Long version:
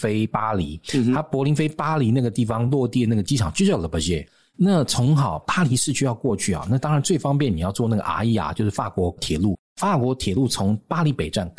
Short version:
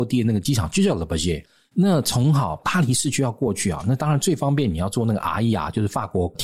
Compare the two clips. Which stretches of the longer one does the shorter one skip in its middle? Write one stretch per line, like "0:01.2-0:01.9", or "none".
none